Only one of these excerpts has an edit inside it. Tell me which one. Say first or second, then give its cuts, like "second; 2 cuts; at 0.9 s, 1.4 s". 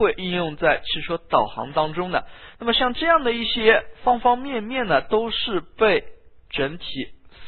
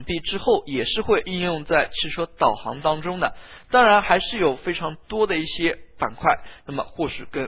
second; 1 cut; at 3.6 s